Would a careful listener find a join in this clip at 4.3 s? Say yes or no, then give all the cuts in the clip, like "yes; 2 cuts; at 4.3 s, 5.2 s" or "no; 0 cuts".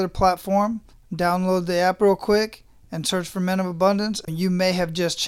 yes; 1 cut; at 4.3 s